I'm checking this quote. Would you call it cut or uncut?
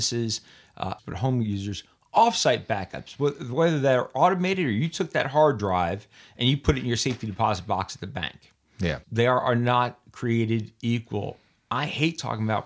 cut